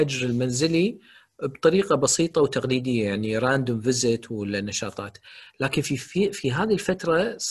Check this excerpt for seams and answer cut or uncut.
uncut